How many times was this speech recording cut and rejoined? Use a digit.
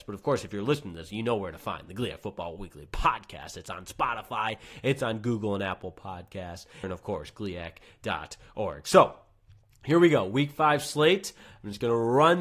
1